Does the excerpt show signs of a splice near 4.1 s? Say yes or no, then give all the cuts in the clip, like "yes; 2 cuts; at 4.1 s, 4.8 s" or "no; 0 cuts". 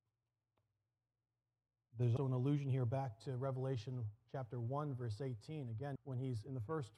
no; 2 cuts; at 2.2 s, 6.0 s